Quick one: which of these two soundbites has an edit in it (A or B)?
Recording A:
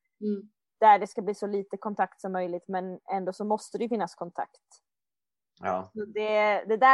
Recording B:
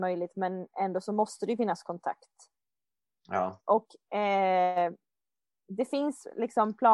B